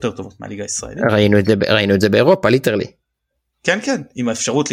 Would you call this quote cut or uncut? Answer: uncut